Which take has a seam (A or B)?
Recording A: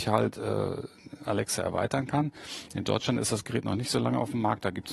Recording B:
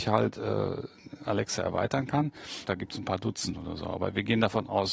B